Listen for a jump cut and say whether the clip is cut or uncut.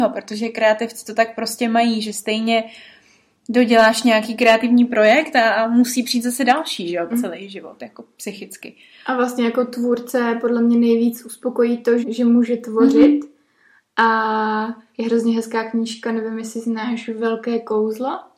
cut